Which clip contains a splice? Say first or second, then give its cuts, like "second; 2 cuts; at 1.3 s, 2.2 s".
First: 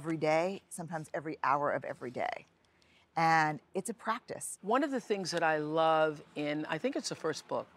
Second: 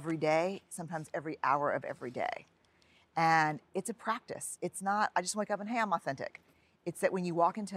first; 1 cut; at 4.6 s